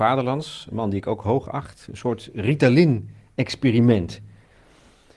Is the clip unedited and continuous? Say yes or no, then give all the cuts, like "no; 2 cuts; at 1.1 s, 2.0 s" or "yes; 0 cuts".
yes; 0 cuts